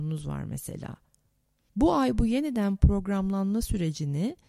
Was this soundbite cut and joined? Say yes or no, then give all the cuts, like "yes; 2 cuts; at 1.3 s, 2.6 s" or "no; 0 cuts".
yes; 1 cut; at 1.6 s